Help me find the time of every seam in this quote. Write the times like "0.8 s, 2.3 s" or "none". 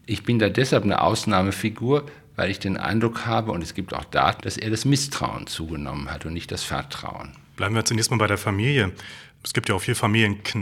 4.4 s

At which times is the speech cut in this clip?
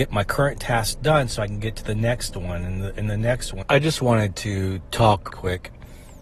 3.6 s, 5.3 s

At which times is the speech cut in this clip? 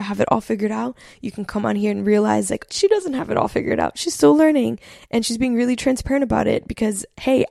2.7 s

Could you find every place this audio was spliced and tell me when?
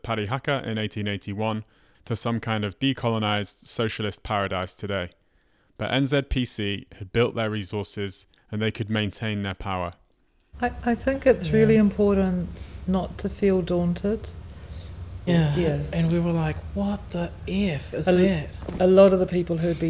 8.4 s, 10.5 s, 15.3 s

